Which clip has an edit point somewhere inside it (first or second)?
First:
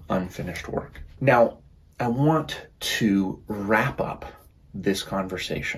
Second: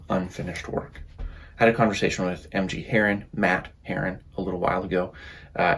first